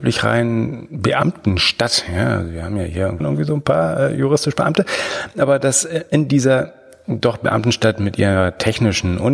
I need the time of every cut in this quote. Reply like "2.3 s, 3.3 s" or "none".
3.2 s